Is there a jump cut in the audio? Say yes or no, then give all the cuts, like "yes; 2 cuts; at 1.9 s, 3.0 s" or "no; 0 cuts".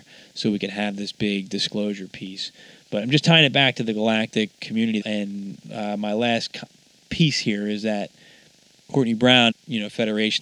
yes; 2 cuts; at 5.0 s, 9.5 s